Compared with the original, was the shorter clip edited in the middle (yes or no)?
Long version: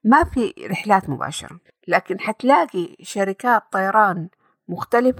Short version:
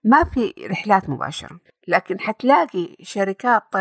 no